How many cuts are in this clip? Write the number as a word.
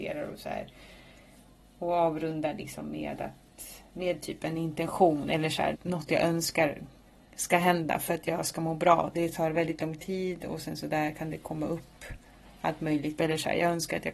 three